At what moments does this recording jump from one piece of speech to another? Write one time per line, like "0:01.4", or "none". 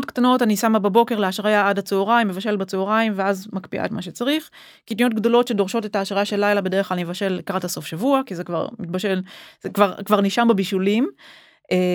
none